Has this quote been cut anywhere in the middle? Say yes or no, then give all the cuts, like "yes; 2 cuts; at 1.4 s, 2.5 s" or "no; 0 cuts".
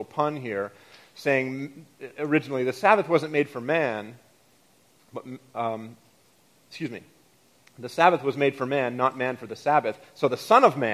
no; 0 cuts